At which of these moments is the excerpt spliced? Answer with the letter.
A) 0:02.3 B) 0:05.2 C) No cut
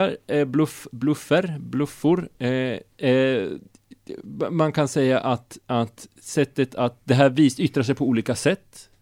C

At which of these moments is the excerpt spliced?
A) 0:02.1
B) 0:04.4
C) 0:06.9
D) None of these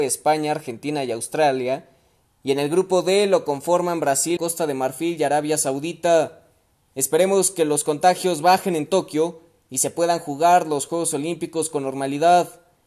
B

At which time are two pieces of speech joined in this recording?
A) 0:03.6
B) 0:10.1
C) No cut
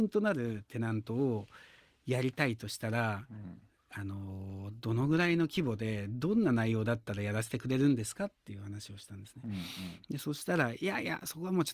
C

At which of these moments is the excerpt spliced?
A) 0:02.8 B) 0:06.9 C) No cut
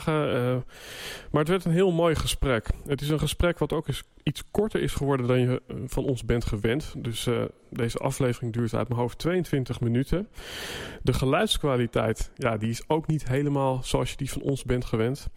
C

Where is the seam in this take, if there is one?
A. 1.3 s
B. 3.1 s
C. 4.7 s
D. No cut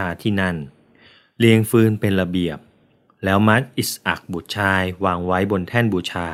D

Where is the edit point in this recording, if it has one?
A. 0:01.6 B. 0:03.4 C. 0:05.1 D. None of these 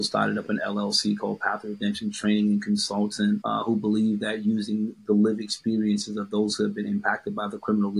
B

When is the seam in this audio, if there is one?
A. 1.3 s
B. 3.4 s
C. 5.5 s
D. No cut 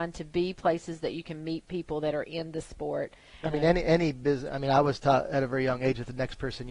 B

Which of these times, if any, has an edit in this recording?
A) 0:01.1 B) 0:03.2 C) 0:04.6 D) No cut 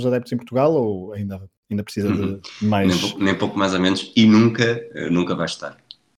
D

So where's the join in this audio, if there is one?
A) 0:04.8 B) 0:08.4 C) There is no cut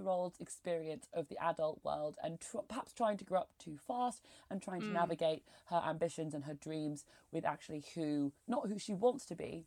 B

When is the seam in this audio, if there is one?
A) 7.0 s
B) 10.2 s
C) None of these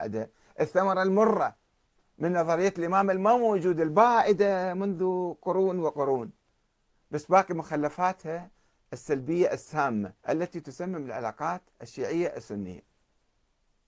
B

